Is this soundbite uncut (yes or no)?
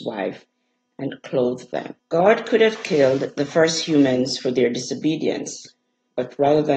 no